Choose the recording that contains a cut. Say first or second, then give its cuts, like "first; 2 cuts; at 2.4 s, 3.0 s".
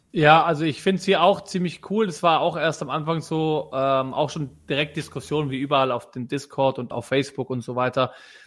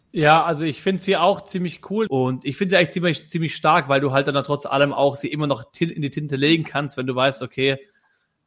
second; 1 cut; at 2.1 s